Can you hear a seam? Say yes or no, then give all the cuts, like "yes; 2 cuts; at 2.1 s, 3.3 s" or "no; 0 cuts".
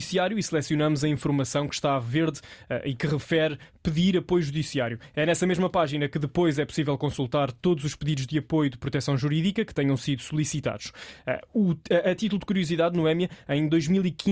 no; 0 cuts